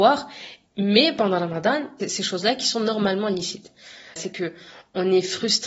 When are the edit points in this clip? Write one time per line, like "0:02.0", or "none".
0:02.0
0:04.2